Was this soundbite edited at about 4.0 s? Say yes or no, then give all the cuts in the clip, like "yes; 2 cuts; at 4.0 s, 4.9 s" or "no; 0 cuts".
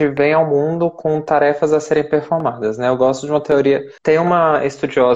yes; 1 cut; at 4.0 s